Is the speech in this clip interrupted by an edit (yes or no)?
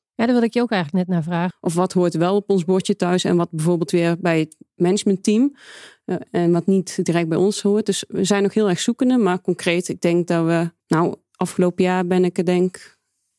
yes